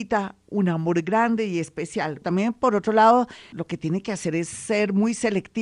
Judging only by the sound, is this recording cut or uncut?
cut